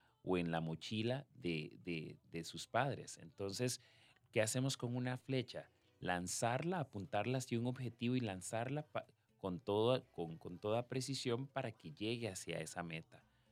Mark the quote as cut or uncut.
uncut